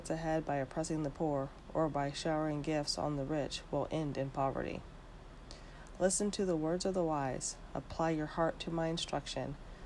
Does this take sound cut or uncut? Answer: uncut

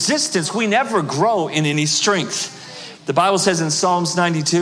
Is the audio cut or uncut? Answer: cut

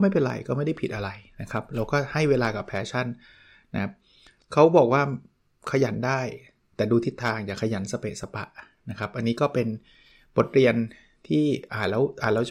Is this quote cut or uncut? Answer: uncut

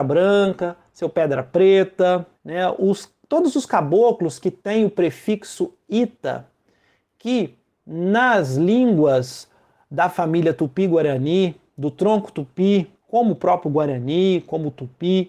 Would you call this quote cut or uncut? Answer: cut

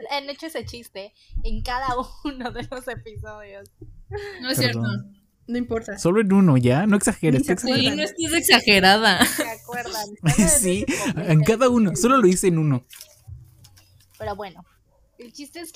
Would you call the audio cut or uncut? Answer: uncut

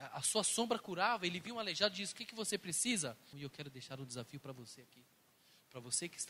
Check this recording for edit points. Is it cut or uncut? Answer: cut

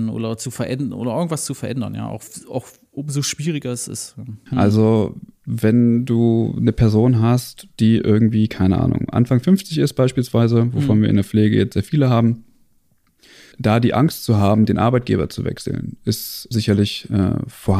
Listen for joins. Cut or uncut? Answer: cut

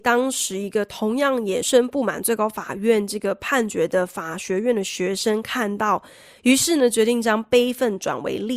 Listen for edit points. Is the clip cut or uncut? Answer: cut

